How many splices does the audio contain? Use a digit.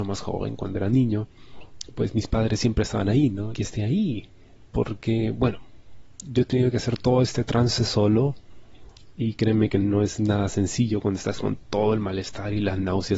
1